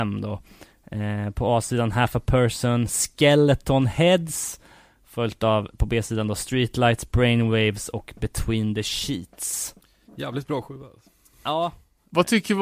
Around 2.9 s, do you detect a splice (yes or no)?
yes